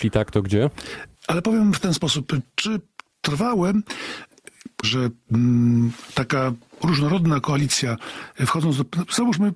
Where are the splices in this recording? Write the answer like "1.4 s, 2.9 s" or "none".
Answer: 1.1 s, 4.8 s